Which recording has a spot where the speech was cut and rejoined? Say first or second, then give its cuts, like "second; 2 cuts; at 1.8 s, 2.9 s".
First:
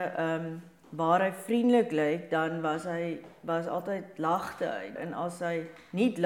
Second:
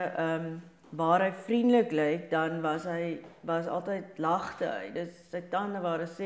first; 1 cut; at 5.0 s